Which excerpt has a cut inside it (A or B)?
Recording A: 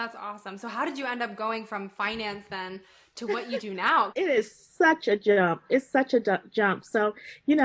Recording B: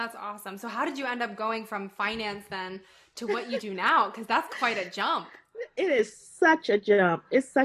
A